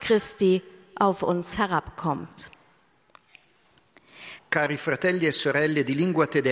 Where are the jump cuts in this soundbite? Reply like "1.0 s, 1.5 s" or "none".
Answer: 4.4 s